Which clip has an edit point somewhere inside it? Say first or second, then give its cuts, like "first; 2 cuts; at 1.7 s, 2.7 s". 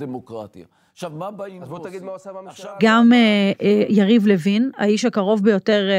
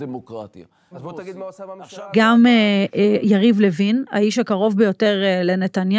second; 1 cut; at 0.9 s